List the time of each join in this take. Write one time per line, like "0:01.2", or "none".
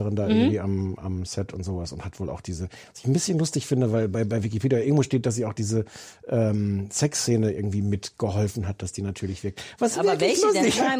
none